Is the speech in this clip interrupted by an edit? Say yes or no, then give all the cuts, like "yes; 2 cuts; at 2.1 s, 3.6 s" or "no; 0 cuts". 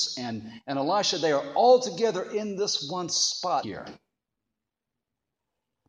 yes; 1 cut; at 3.6 s